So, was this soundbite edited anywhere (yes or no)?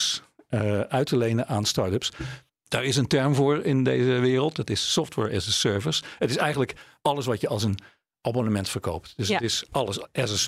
yes